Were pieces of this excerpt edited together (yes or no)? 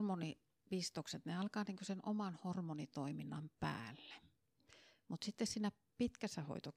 no